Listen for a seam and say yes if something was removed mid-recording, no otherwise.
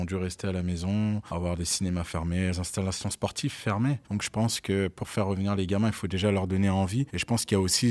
yes